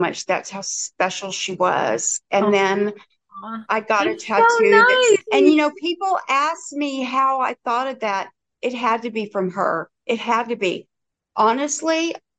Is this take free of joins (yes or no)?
no